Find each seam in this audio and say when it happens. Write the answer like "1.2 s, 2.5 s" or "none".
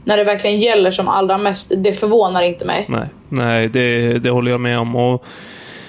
none